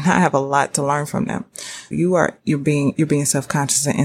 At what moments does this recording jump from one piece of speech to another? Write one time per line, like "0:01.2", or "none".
0:01.9
0:02.9

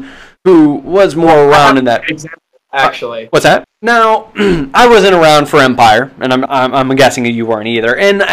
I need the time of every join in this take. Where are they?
0:03.6
0:06.5

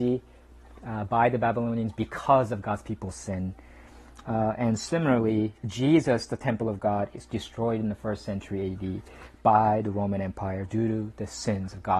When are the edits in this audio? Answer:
none

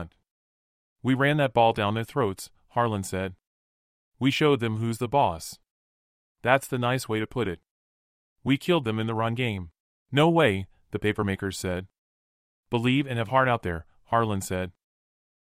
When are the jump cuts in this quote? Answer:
0:10.0

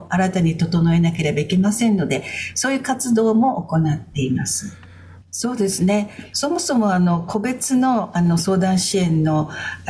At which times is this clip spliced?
0:05.2
0:06.3

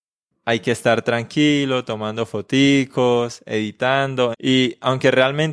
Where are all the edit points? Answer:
0:04.3

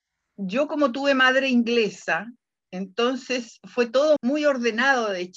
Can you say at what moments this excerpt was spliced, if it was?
0:04.2

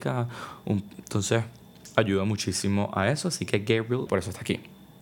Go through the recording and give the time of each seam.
0:04.1

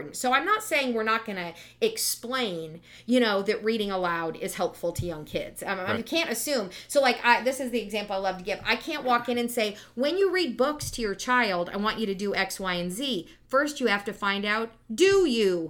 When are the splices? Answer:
0:06.0

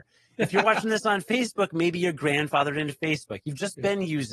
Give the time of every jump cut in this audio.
none

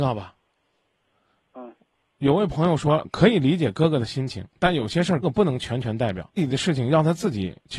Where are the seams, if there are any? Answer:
0:05.2
0:06.4

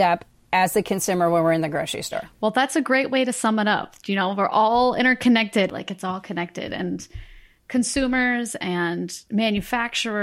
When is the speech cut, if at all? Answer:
0:05.7

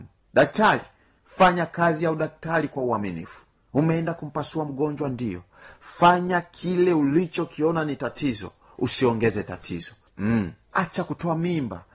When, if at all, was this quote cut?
none

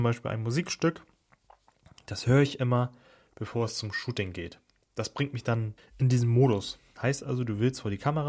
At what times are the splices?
0:05.8
0:07.0

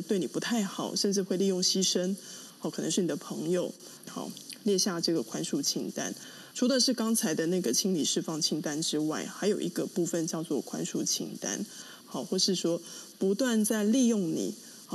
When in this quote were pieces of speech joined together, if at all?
0:04.1
0:06.5
0:12.0

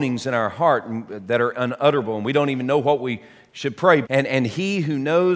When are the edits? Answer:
0:04.0

